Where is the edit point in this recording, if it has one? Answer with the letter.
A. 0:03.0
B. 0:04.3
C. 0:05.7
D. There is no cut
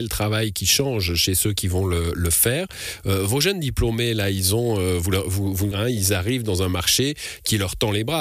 C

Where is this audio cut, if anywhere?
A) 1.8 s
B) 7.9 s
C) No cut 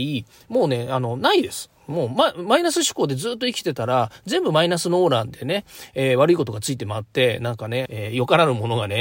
B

